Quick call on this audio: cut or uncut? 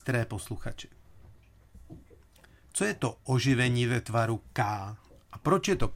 uncut